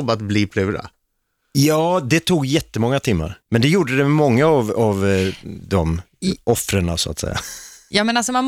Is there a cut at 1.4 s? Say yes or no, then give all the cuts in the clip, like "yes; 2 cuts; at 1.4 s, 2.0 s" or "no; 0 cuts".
no; 1 cut; at 3.4 s